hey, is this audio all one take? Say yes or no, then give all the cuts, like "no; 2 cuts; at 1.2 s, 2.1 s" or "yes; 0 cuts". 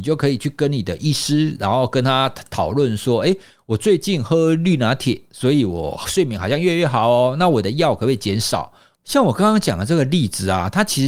no; 1 cut; at 9.0 s